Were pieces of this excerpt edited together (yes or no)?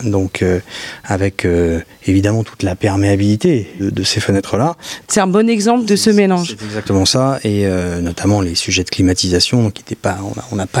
yes